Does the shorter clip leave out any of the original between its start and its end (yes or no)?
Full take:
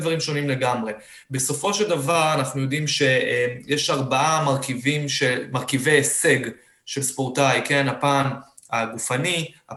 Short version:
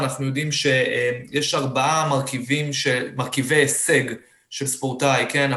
no